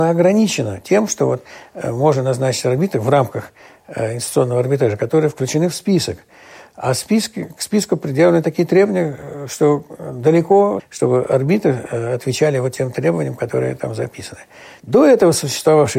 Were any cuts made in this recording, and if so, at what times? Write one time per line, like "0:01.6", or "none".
0:10.8
0:14.8